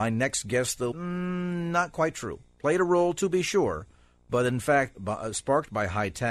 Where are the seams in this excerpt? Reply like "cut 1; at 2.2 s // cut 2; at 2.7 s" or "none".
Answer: cut 1; at 0.9 s // cut 2; at 4.9 s